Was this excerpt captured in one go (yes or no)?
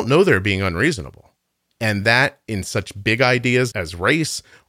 no